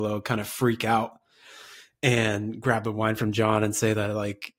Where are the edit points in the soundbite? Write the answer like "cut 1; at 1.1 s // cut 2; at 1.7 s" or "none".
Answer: none